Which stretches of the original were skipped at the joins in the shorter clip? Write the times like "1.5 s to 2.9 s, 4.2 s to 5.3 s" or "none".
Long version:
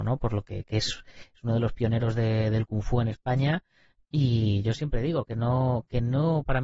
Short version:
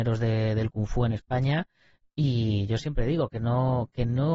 none